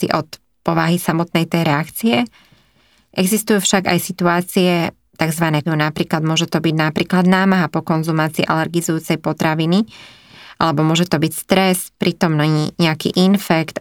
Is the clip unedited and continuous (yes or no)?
no